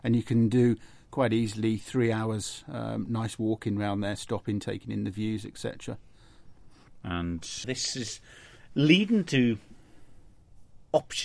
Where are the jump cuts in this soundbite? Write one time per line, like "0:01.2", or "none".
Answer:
0:07.6